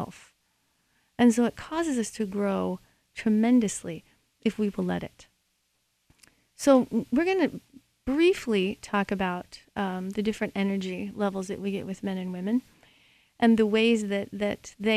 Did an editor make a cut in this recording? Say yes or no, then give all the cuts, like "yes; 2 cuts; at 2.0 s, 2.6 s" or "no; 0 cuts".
no; 0 cuts